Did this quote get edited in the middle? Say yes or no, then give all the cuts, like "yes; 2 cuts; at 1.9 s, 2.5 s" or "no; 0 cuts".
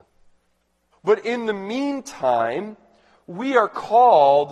yes; 1 cut; at 0.9 s